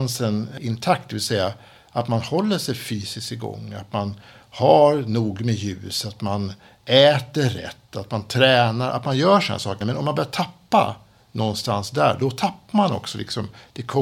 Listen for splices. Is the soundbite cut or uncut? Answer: cut